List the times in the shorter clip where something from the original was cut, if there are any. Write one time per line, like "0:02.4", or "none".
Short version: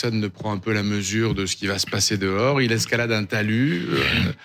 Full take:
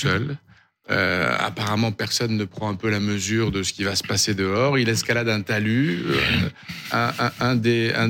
none